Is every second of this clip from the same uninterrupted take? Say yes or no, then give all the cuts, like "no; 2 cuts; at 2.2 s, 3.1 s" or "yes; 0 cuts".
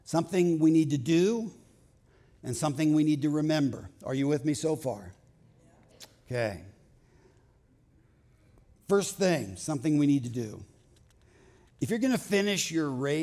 yes; 0 cuts